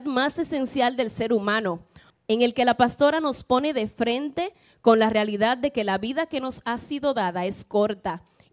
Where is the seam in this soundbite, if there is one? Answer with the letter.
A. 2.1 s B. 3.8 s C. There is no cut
A